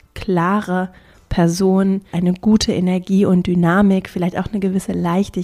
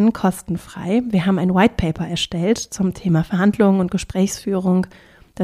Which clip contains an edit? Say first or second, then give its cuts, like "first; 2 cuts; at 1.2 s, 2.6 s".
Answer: first; 1 cut; at 2.1 s